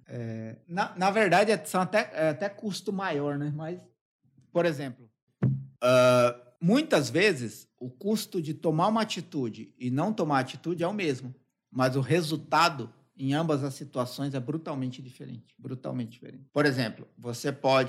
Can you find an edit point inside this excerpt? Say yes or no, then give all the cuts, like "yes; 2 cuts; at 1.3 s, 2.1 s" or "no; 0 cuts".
no; 0 cuts